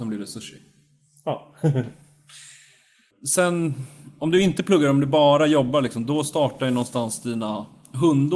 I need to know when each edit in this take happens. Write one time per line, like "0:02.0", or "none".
none